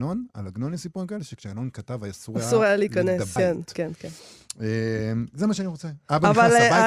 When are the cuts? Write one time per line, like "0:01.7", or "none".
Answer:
0:03.4